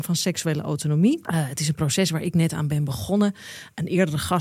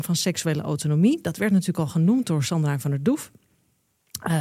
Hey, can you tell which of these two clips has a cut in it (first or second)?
first